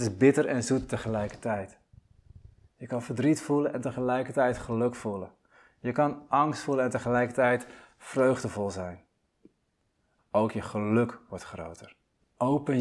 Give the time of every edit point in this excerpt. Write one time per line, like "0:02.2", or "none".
0:10.2